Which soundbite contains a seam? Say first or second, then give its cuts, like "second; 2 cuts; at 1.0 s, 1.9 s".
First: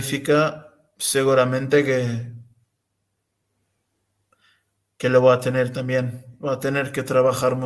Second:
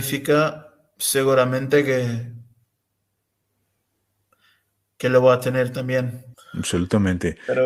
second; 1 cut; at 6.3 s